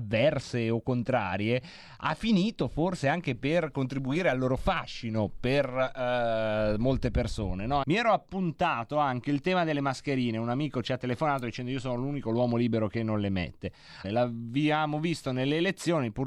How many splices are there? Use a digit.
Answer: 2